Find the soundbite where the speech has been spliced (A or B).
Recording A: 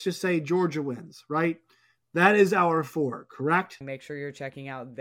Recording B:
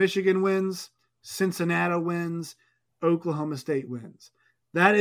A